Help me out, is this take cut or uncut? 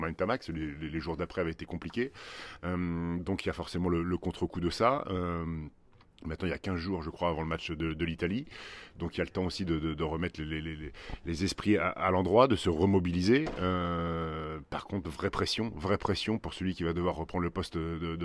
uncut